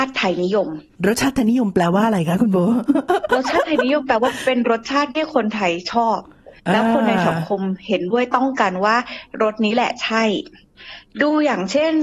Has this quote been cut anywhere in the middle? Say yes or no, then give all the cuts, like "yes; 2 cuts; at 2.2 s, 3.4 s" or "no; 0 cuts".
yes; 1 cut; at 6.6 s